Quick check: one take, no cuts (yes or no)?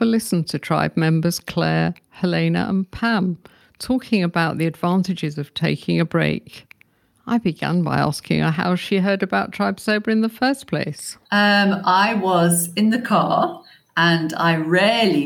no